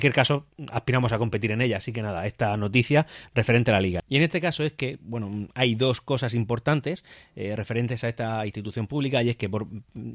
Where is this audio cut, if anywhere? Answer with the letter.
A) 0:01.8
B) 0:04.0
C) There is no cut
B